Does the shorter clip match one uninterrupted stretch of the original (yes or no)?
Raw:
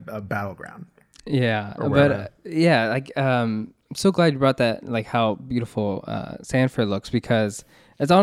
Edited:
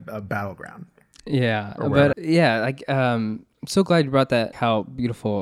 no